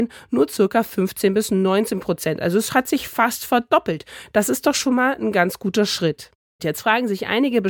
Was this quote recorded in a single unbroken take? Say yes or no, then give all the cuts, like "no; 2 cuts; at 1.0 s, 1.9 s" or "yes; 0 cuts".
no; 1 cut; at 6.6 s